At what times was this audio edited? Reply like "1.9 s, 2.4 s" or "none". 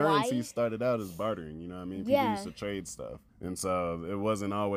3.3 s